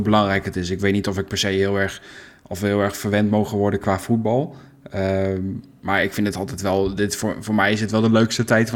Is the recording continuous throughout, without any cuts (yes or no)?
yes